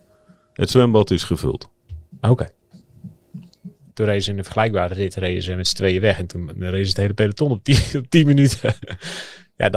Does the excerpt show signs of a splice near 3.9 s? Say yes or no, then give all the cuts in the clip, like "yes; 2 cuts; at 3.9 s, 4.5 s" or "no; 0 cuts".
yes; 1 cut; at 3.9 s